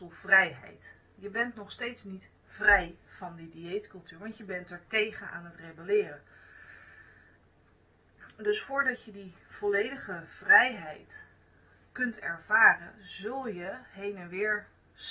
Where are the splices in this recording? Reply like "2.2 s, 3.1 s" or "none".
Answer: none